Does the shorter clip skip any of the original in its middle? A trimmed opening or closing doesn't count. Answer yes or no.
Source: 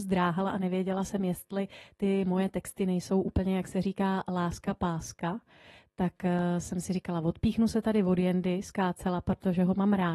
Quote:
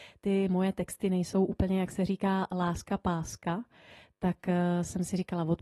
no